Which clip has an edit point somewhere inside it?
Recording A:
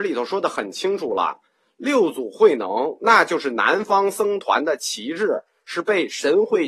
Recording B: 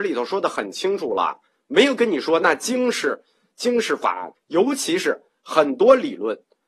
B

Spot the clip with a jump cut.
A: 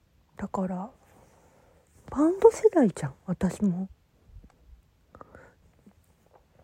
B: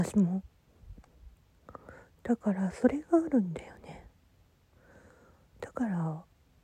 A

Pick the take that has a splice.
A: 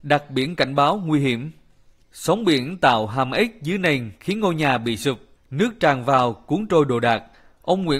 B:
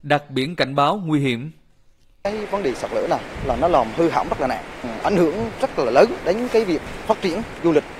A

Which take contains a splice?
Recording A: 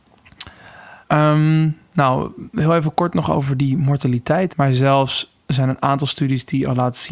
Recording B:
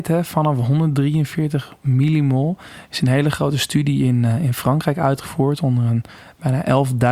A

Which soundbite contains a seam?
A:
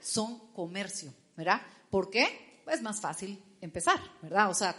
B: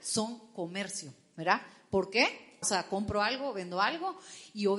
B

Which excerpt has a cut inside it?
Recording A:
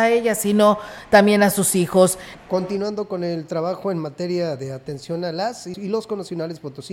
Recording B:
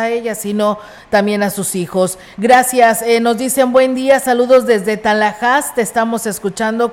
A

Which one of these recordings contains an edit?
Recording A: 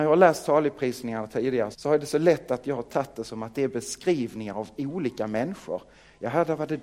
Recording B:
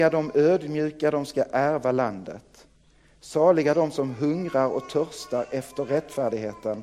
A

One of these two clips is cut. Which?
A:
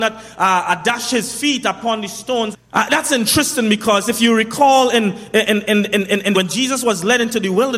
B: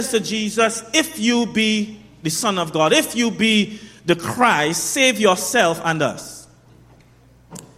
A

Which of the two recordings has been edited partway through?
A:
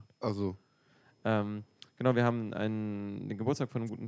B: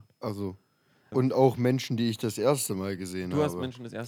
B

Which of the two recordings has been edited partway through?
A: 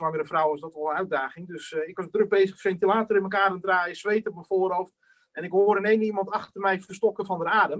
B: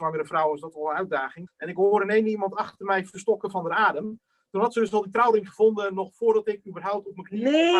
B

